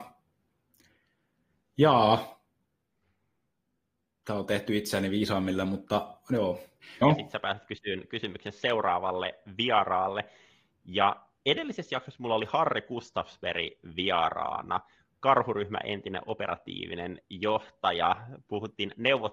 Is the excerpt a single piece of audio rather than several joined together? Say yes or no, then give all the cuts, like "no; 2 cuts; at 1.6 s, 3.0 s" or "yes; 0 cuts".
no; 1 cut; at 7.0 s